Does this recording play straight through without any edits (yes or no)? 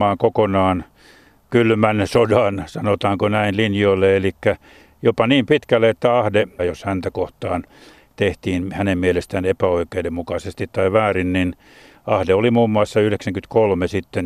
no